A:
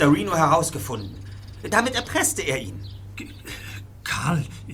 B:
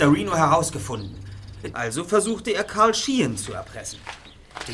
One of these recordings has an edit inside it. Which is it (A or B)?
B